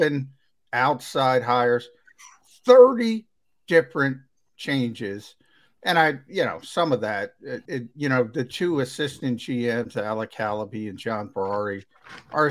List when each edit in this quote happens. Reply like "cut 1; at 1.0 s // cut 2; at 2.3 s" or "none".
cut 1; at 7.7 s

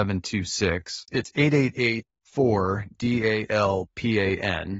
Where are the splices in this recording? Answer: none

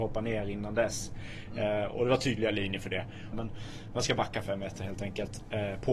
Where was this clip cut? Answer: cut 1; at 3.3 s

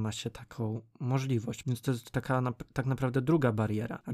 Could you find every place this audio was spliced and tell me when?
cut 1; at 1.6 s

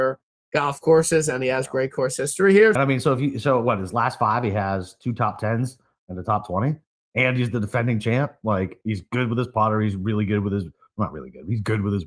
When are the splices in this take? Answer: cut 1; at 2.8 s

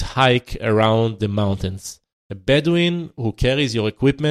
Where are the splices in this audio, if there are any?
cut 1; at 2.1 s

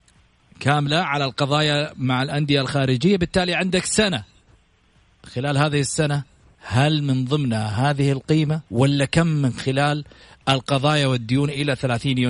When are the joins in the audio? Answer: cut 1; at 8.7 s

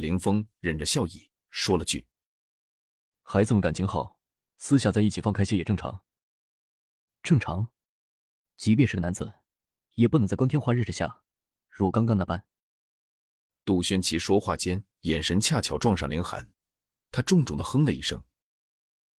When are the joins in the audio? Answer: none

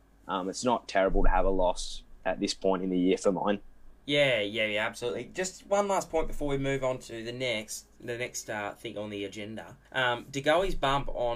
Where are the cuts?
cut 1; at 4.0 s // cut 2; at 9.9 s

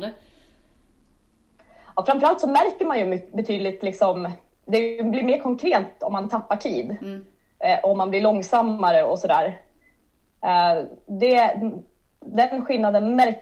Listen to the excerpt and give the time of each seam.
none

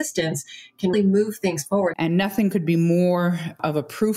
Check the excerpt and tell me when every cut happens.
cut 1; at 0.9 s // cut 2; at 1.9 s

